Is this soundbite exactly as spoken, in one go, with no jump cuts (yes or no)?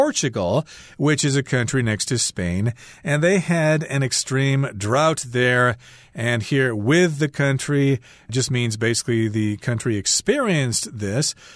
yes